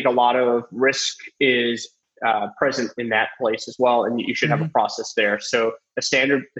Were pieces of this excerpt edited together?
no; 0 cuts

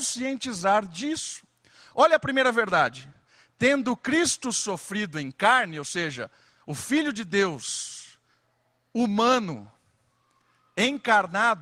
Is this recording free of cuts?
yes; 0 cuts

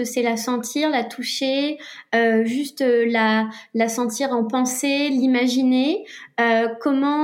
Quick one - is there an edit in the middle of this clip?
no; 0 cuts

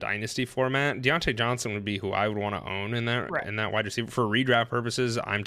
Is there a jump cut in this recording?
no; 0 cuts

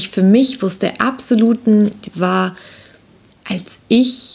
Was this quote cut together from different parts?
yes; 1 cut; at 2.1 s

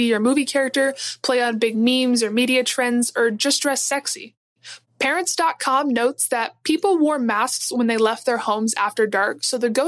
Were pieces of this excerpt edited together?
yes; 1 cut; at 4.8 s

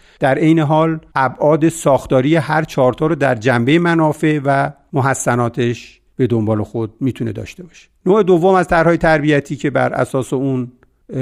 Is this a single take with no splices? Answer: no; 1 cut; at 1.1 s

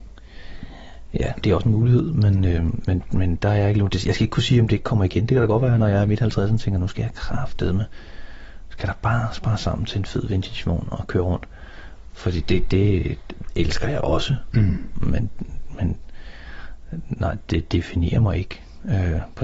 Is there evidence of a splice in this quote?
no; 0 cuts

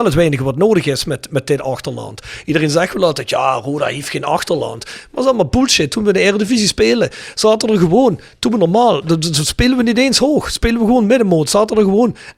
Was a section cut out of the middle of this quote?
no; 0 cuts

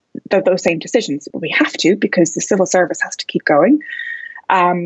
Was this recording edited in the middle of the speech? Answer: yes; 1 cut; at 1.3 s

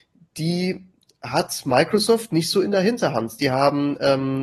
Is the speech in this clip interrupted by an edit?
no; 0 cuts

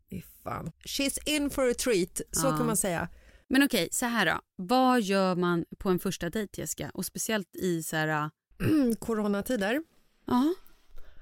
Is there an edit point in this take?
no; 0 cuts

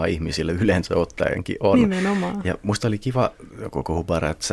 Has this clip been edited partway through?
no; 0 cuts

